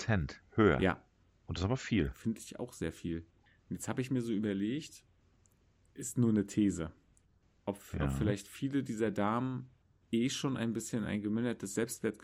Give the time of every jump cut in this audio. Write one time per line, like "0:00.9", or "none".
none